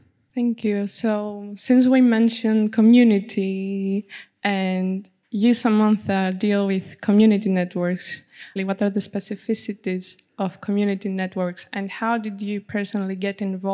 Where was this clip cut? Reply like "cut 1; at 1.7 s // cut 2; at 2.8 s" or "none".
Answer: cut 1; at 8.6 s